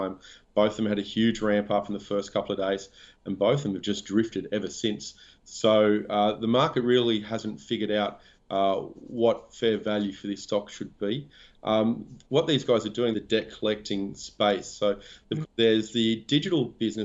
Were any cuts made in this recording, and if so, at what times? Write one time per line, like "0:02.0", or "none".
0:13.1
0:15.4